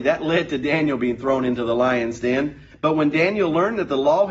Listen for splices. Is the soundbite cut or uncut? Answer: cut